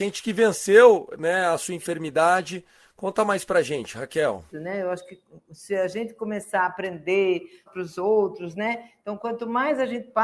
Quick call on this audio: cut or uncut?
cut